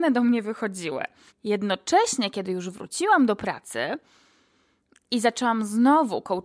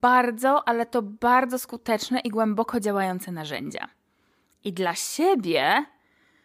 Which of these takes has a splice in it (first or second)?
first